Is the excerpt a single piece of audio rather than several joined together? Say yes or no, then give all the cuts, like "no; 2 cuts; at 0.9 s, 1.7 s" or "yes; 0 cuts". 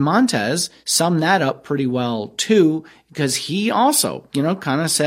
yes; 0 cuts